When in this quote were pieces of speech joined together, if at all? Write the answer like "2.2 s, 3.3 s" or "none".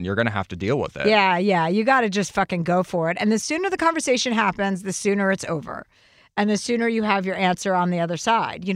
none